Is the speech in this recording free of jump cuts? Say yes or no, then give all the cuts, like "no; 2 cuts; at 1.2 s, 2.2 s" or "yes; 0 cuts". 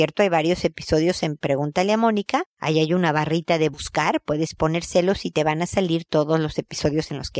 yes; 0 cuts